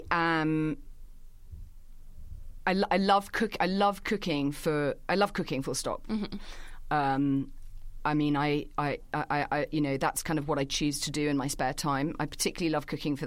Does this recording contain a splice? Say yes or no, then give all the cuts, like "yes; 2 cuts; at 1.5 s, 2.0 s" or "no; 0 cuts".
no; 0 cuts